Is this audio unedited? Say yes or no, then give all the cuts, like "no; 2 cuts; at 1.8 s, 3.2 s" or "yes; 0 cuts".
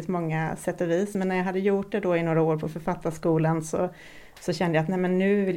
yes; 0 cuts